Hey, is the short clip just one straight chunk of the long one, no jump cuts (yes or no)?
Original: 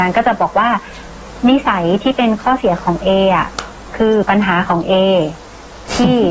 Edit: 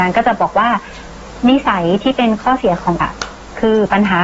no